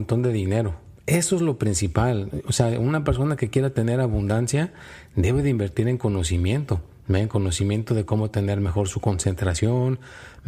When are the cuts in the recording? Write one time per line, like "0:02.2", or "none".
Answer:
0:01.0